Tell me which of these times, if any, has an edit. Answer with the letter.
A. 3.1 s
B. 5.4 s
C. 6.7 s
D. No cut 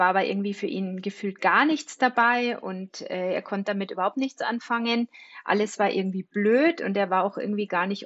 D